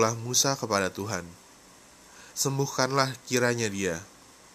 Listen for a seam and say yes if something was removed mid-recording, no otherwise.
yes